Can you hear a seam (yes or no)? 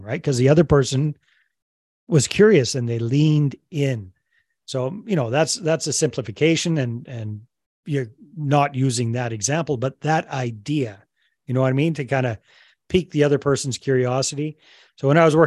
no